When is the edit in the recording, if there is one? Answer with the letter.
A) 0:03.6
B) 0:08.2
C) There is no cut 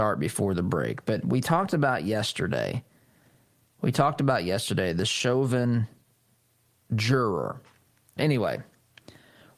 B